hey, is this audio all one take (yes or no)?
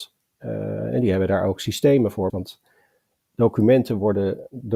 no